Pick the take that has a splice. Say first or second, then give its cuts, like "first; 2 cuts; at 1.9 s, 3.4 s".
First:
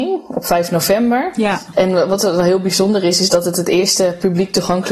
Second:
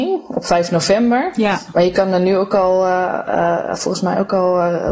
first; 1 cut; at 1.7 s